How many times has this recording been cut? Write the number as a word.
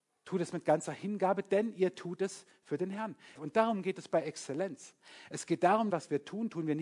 two